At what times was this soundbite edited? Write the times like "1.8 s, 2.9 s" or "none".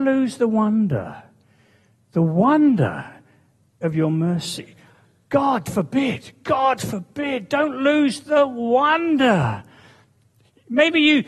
none